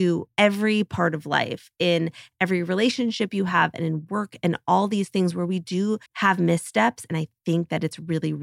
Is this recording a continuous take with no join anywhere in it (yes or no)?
no